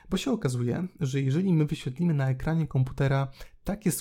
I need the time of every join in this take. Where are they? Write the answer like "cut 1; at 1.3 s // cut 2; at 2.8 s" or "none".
none